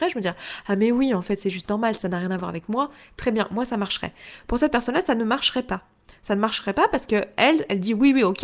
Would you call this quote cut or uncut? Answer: uncut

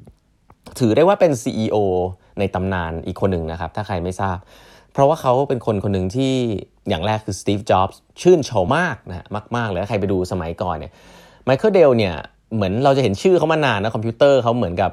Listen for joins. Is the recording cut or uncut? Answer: cut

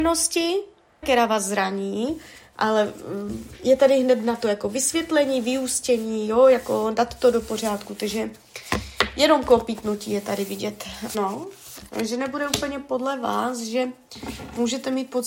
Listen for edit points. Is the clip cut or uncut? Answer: cut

